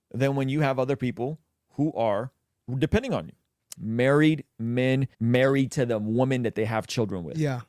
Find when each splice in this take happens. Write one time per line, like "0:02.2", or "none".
0:03.7
0:05.1